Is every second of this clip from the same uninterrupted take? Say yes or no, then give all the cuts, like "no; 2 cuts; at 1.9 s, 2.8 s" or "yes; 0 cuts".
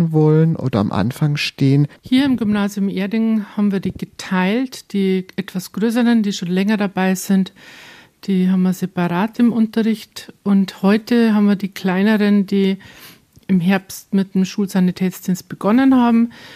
no; 1 cut; at 2.0 s